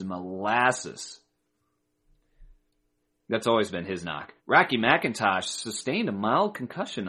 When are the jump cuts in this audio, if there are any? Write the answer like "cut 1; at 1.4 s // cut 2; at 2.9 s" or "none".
cut 1; at 4.4 s